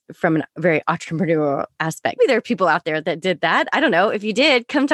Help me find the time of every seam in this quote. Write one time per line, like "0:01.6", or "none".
0:02.2